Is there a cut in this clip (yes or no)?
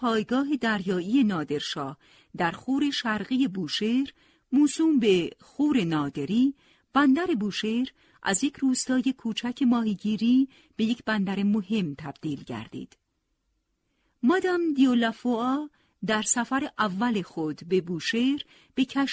no